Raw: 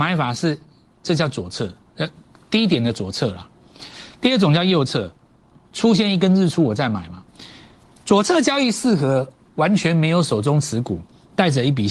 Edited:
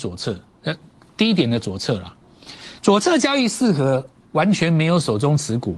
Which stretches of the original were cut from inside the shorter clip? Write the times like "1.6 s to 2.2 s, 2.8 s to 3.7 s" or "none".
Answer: 4.1 s to 8.0 s